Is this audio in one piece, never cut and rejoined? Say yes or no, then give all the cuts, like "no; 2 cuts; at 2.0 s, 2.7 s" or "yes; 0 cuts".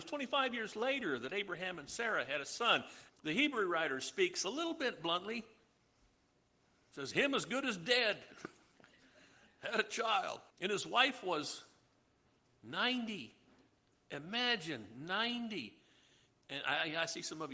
no; 2 cuts; at 3.1 s, 10.5 s